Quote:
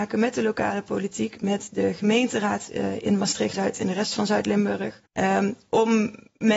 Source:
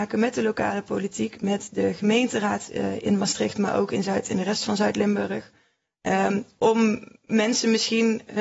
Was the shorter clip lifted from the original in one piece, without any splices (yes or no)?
no